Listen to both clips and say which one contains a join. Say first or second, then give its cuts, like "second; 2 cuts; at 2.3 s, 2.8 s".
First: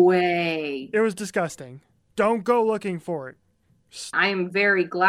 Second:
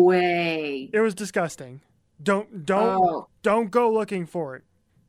first; 2 cuts; at 2.1 s, 4.1 s